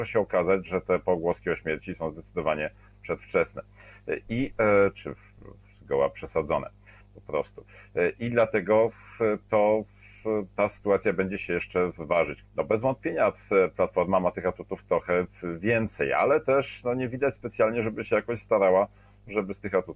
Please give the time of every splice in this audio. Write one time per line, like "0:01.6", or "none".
0:12.4

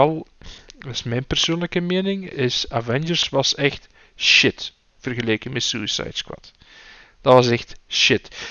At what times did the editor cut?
0:02.3

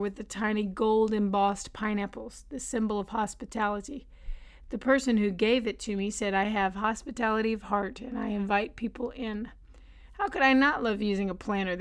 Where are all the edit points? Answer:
none

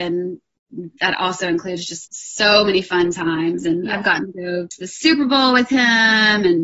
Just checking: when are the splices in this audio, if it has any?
0:02.1

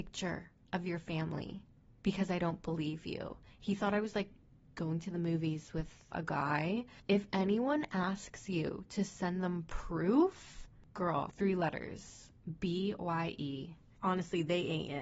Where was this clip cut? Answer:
0:06.1

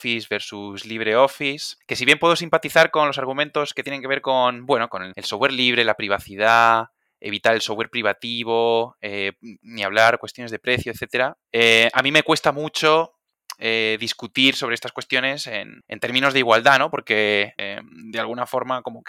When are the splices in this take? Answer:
none

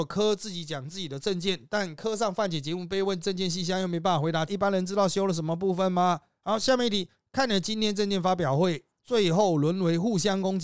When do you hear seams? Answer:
0:04.5
0:06.4

